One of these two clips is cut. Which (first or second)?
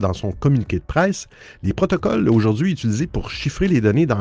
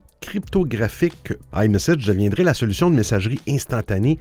second